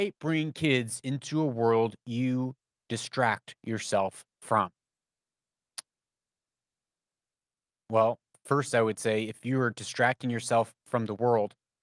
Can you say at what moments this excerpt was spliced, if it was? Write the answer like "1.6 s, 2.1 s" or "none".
none